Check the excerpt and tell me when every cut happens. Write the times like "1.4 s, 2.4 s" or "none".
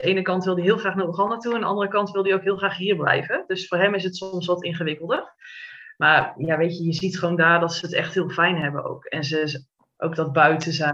10.0 s